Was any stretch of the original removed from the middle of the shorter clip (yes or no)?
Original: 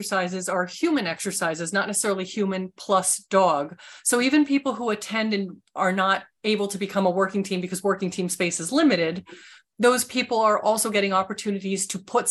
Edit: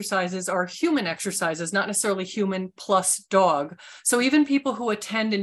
no